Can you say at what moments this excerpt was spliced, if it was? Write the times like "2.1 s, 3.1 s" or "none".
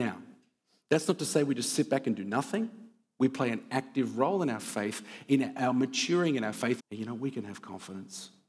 6.8 s